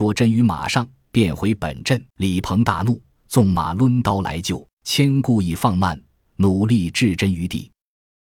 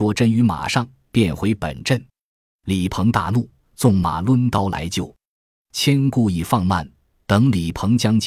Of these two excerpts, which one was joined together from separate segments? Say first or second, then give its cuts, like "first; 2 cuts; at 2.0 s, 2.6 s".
first; 3 cuts; at 2.1 s, 4.7 s, 6.3 s